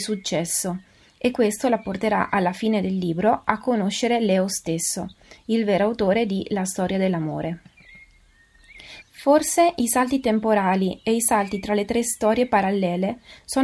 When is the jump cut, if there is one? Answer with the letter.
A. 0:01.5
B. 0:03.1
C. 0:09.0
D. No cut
C